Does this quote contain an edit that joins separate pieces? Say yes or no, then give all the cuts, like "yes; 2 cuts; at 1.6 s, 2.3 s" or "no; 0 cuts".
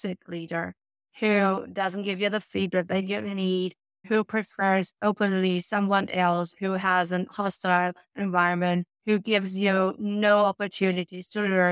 yes; 2 cuts; at 4.0 s, 8.9 s